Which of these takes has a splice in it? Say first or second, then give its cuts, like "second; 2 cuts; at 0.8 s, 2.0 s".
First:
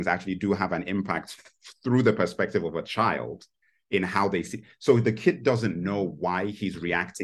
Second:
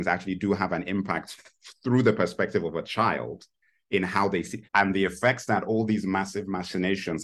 second; 1 cut; at 4.6 s